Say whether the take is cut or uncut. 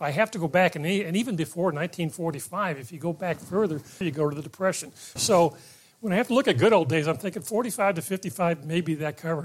cut